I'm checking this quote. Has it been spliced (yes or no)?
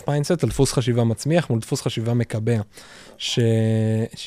no